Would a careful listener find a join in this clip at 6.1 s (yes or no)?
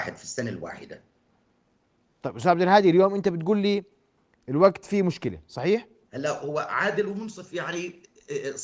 yes